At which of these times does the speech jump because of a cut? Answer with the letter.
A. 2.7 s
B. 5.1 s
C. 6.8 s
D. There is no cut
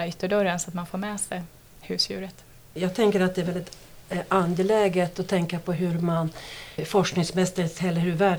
C